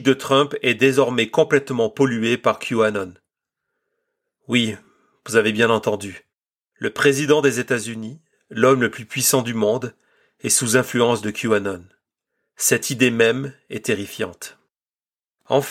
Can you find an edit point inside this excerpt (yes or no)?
no